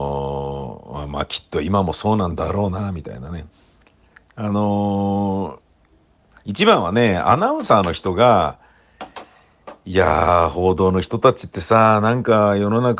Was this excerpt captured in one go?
yes; 0 cuts

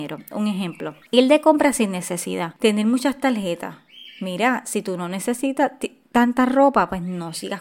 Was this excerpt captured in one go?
yes; 0 cuts

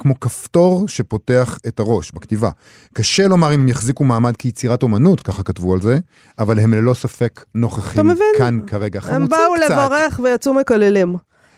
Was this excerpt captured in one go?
yes; 0 cuts

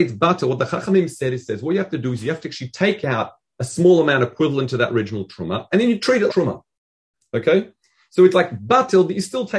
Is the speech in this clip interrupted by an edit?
yes; 1 cut; at 6.3 s

